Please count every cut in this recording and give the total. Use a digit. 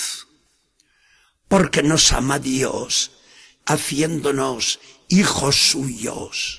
1